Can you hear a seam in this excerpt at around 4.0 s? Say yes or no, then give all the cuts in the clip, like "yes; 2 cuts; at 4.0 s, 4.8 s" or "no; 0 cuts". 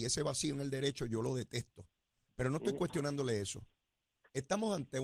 no; 0 cuts